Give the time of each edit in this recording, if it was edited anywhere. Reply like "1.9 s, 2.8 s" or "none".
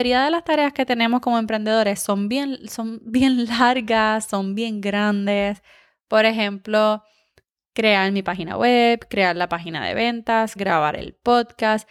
10.6 s